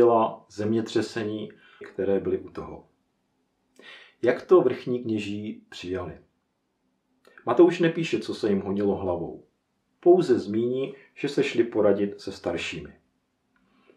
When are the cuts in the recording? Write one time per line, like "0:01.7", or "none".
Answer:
0:01.8